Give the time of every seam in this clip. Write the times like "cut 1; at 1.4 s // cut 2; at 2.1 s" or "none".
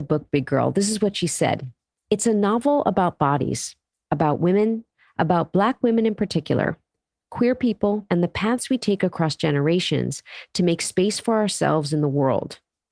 cut 1; at 8.1 s